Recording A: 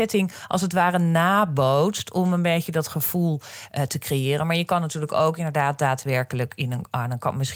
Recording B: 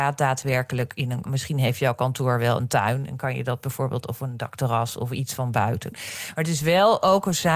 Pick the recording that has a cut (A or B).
B